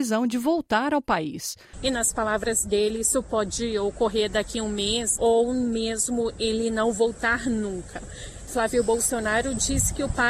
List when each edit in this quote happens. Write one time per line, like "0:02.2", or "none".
0:01.7
0:05.2
0:08.5